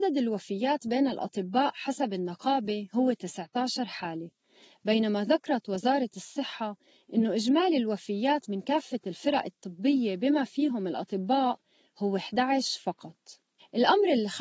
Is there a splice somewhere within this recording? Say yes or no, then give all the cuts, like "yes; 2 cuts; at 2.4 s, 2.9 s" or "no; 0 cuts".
no; 0 cuts